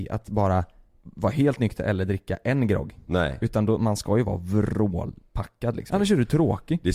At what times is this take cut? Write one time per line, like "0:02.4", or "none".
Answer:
0:05.9